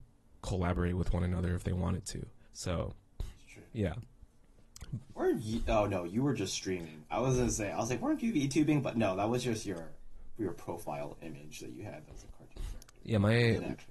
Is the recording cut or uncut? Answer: cut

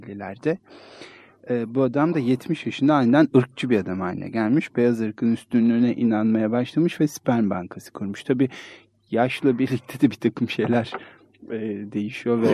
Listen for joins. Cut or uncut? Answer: uncut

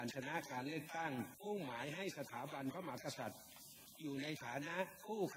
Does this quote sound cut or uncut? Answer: cut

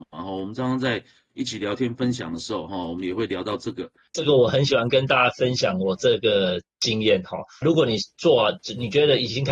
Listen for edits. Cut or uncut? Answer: cut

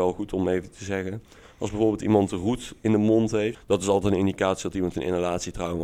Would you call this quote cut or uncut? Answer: cut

